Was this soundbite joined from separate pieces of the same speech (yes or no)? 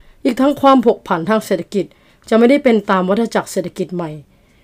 no